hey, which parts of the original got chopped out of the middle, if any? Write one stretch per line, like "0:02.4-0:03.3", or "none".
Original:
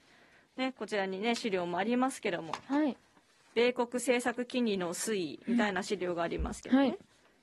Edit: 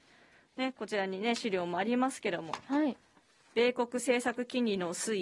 none